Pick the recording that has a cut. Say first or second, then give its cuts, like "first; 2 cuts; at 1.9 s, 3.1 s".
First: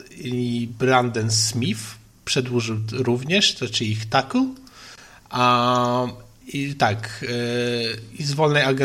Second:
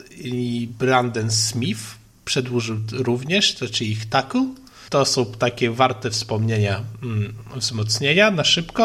second; 1 cut; at 4.9 s